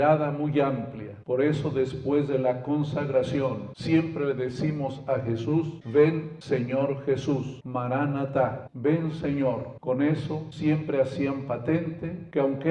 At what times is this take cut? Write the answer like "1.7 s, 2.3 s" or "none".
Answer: 7.6 s